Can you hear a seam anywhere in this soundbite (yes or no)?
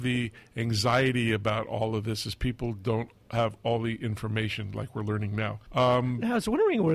yes